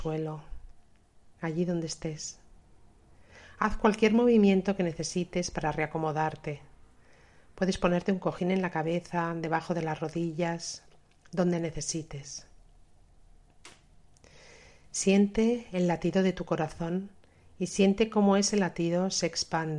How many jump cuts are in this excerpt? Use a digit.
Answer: 1